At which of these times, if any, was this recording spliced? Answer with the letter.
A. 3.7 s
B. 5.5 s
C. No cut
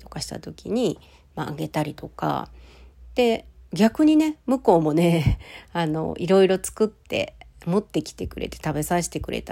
A